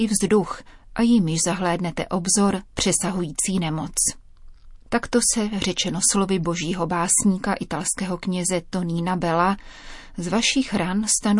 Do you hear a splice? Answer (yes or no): yes